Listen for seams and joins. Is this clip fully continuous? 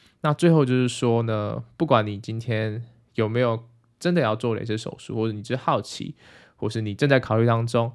yes; 0 cuts

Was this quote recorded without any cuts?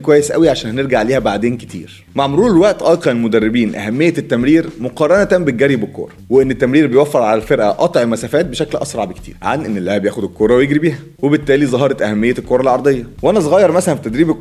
yes; 0 cuts

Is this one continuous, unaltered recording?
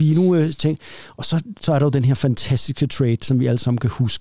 yes; 0 cuts

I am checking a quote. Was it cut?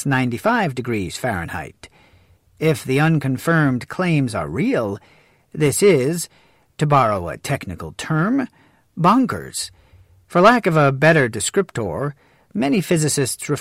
yes; 1 cut; at 2.4 s

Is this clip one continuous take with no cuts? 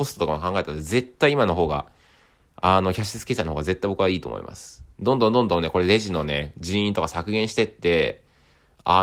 yes; 0 cuts

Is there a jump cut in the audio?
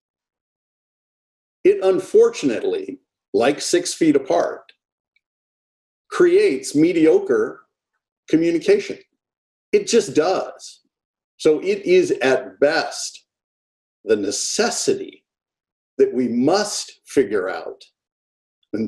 yes; 1 cut; at 11.2 s

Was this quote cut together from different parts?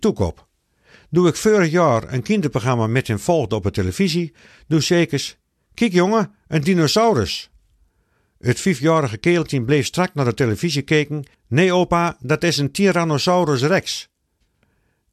yes; 1 cut; at 11.3 s

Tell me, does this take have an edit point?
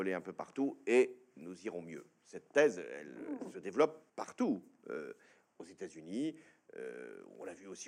yes; 1 cut; at 4.1 s

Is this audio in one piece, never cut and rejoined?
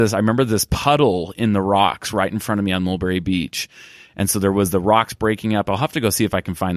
yes; 0 cuts

